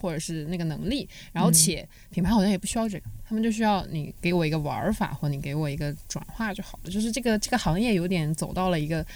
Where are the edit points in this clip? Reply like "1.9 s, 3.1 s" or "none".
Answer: none